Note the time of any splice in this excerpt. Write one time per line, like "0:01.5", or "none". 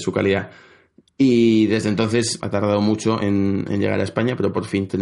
0:02.4